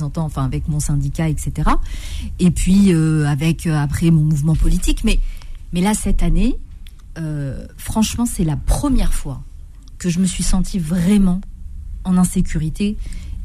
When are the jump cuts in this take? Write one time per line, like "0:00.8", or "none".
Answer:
none